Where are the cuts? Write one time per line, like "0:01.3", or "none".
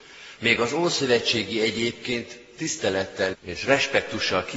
0:03.3